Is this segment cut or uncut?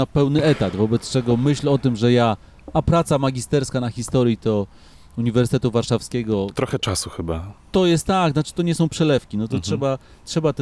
uncut